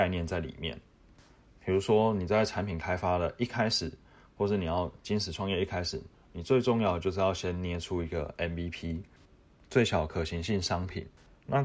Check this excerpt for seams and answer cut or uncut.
uncut